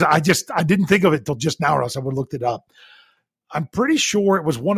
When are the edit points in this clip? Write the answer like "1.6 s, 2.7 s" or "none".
3.4 s